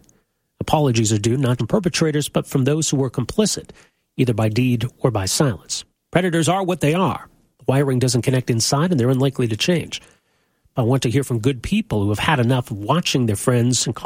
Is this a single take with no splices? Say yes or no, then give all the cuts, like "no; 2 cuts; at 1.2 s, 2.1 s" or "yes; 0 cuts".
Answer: no; 2 cuts; at 1.6 s, 10.8 s